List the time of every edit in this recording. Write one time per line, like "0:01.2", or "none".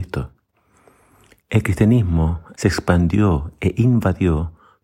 0:01.4
0:02.5